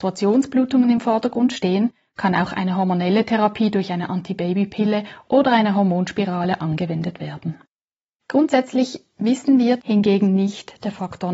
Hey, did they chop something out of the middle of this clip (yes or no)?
yes